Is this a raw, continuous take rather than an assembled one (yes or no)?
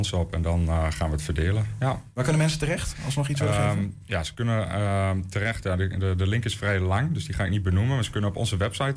yes